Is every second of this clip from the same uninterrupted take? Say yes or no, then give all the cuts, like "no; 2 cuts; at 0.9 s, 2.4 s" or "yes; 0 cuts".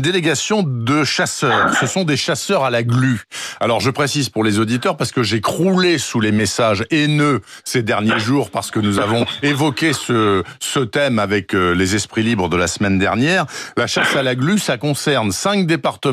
yes; 0 cuts